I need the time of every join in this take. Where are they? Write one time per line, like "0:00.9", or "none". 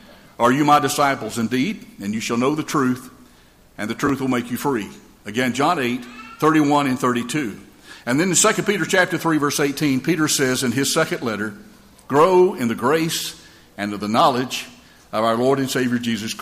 none